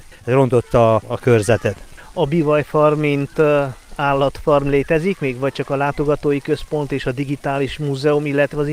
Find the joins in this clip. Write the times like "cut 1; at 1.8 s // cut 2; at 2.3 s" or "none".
cut 1; at 1.0 s